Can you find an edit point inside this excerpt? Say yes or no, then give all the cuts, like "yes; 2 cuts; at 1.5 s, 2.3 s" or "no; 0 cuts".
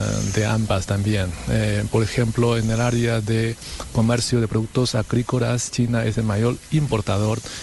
no; 0 cuts